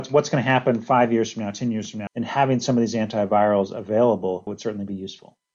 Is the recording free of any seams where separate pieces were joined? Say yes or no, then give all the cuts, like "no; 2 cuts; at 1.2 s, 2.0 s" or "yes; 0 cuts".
no; 2 cuts; at 2.1 s, 4.5 s